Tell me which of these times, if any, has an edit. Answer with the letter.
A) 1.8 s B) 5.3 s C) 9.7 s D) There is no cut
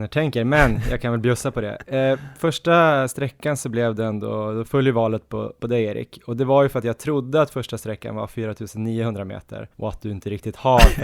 C